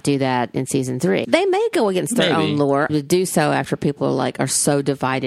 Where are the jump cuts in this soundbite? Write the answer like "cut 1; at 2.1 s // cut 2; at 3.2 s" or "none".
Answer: cut 1; at 1.2 s // cut 2; at 2.9 s